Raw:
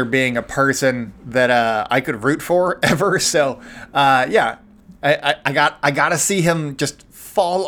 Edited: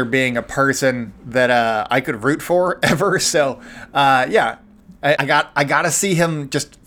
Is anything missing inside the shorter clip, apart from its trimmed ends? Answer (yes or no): yes